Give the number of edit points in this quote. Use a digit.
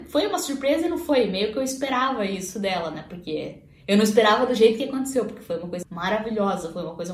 1